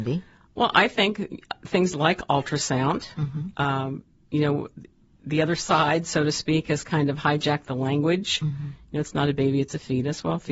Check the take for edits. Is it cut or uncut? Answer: uncut